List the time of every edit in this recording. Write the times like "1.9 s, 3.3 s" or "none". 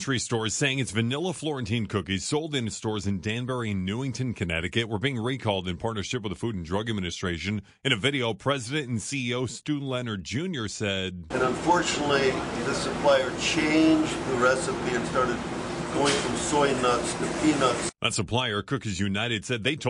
11.3 s